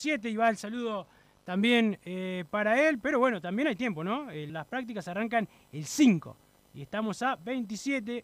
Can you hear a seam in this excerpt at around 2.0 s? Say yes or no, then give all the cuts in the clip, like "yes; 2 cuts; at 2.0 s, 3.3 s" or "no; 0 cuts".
no; 1 cut; at 4.5 s